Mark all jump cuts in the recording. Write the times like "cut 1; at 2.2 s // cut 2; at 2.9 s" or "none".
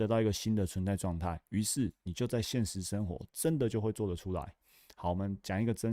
none